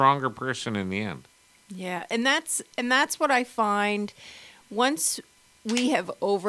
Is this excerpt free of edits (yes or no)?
yes